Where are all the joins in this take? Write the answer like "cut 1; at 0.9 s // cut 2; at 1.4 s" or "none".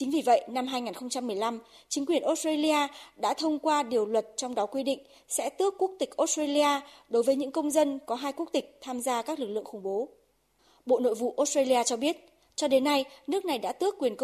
none